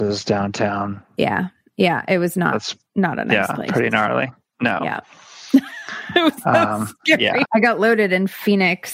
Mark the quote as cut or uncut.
cut